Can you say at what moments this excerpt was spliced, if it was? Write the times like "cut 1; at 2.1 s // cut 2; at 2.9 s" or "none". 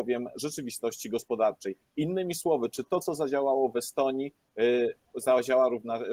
none